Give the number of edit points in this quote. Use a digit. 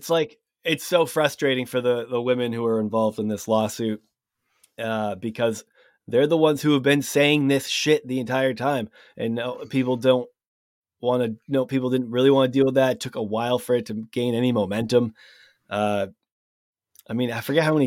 0